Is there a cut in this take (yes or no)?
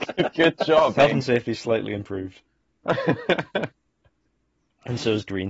yes